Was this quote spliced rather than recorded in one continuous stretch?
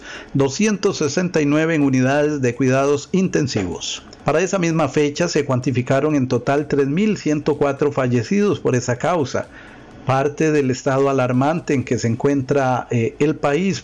no; 0 cuts

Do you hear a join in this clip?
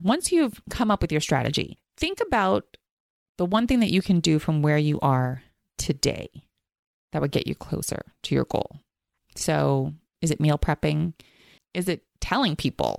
yes; 1 cut; at 11.6 s

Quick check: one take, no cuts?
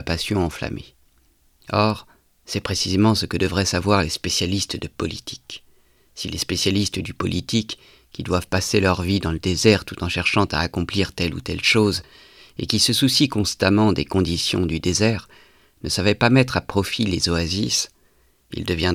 no; 1 cut; at 1.6 s

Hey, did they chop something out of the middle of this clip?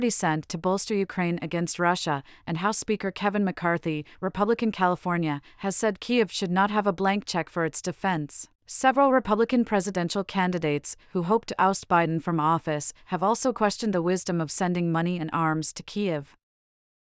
yes; 1 cut; at 8.5 s

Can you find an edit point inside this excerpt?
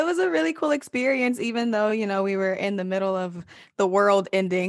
no; 0 cuts

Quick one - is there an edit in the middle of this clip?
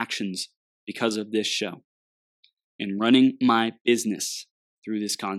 no; 0 cuts

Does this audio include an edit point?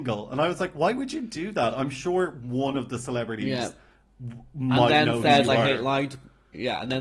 no; 0 cuts

